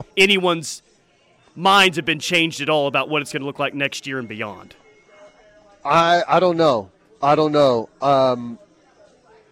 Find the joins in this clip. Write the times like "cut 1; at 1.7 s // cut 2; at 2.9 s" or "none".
none